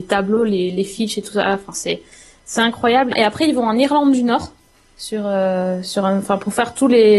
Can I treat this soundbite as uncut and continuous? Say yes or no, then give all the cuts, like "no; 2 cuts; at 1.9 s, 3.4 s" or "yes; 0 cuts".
no; 1 cut; at 3.1 s